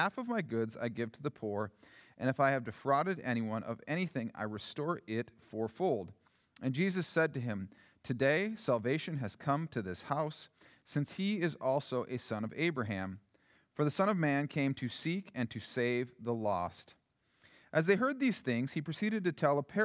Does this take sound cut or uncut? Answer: uncut